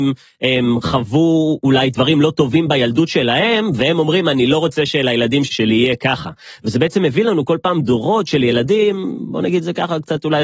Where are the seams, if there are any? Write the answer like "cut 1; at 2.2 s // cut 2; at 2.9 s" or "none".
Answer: cut 1; at 5.5 s

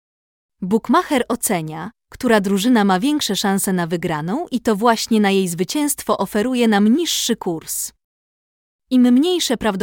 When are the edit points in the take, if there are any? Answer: none

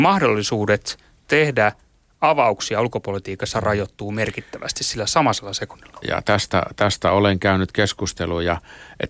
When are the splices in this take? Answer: cut 1; at 6.0 s

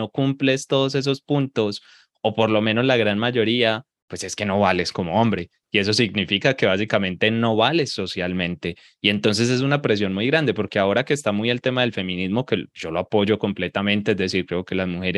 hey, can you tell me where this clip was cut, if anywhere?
none

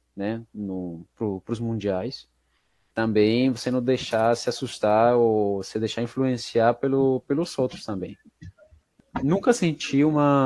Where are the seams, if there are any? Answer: cut 1; at 2.9 s

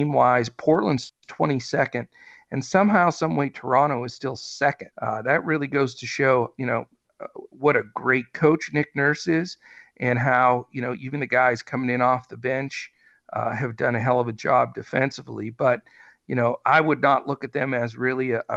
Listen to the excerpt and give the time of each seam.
cut 1; at 4.9 s

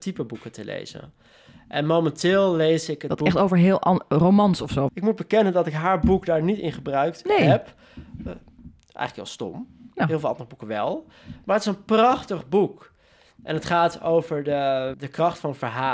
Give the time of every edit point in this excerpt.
cut 1; at 4.9 s // cut 2; at 14.9 s

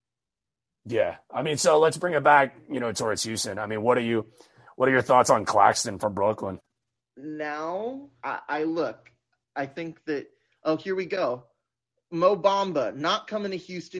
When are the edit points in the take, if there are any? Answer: cut 1; at 8.2 s

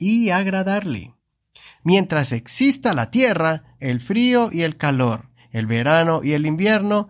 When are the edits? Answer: cut 1; at 1.8 s // cut 2; at 3.8 s

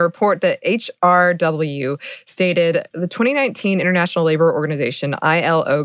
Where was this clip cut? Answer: cut 1; at 2.9 s

